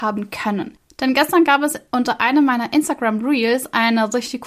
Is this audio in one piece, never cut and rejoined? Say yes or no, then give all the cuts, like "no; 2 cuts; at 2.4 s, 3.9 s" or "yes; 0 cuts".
yes; 0 cuts